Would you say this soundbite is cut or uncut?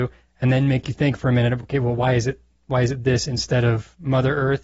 uncut